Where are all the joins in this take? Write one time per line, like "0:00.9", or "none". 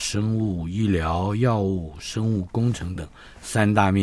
0:03.0